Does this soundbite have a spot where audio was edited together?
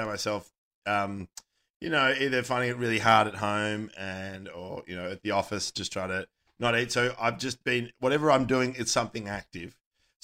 no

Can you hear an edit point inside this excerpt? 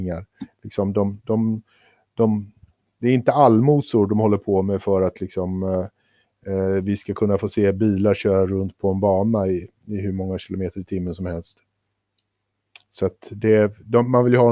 no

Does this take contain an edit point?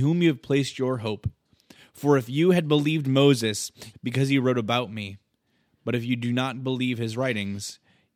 yes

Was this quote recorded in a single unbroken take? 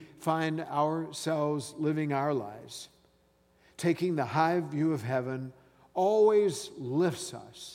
yes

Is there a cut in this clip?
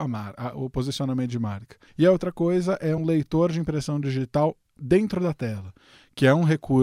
yes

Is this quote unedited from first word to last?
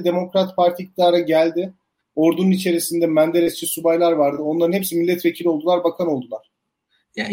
yes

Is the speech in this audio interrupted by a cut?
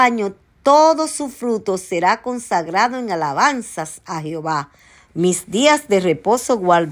yes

